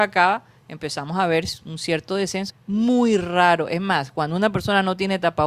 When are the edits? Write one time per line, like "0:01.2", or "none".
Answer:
0:02.5